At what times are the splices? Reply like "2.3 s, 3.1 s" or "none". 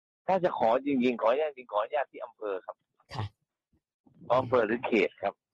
none